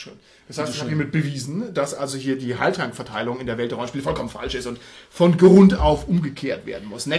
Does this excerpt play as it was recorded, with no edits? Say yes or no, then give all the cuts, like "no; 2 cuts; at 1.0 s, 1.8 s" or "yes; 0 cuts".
yes; 0 cuts